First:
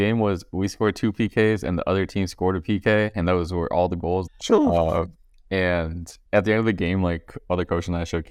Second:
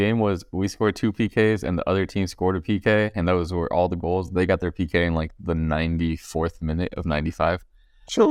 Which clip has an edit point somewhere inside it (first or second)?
first